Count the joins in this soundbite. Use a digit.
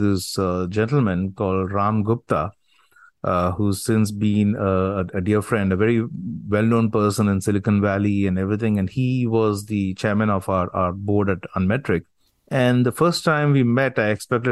0